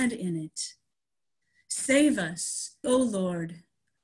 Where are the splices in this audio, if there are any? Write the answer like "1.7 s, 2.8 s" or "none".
2.8 s